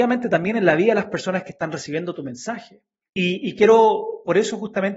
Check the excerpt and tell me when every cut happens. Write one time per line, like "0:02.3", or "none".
0:03.0